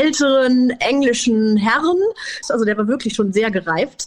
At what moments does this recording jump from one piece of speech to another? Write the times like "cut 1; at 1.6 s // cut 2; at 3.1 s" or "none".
cut 1; at 2.4 s